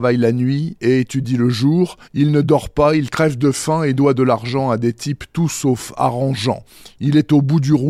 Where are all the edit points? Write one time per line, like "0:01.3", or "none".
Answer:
0:02.0

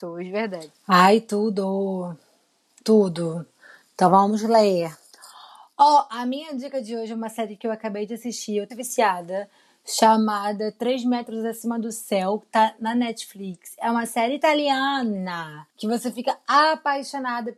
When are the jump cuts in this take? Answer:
0:08.7
0:15.7

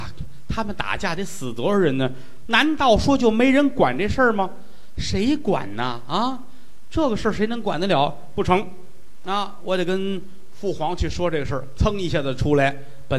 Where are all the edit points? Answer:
0:02.5
0:11.8

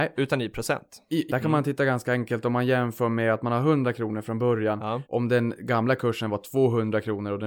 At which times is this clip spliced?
0:01.3
0:05.1

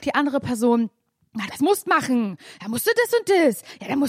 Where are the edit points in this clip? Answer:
0:01.5

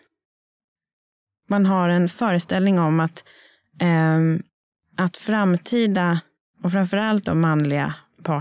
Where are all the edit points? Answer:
none

